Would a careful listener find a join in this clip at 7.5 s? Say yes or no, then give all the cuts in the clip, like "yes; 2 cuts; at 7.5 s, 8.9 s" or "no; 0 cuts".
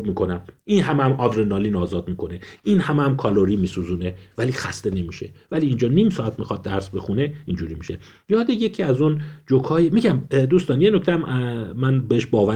no; 0 cuts